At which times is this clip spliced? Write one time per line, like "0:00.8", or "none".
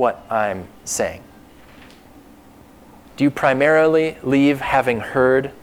0:03.0